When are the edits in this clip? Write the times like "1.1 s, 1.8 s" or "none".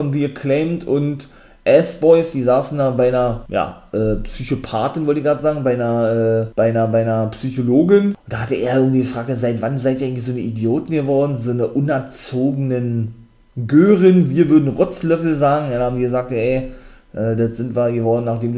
none